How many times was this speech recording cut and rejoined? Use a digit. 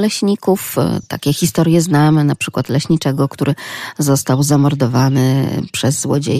0